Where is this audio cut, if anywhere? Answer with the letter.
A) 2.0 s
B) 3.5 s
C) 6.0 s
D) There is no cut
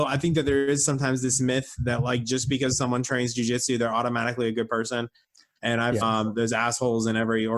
C